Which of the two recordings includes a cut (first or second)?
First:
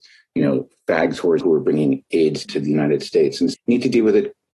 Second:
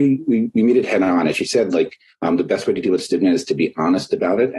first